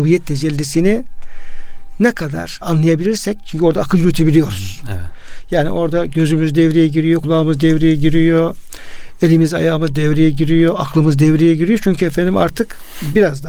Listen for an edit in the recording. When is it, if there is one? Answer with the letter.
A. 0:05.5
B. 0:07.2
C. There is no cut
C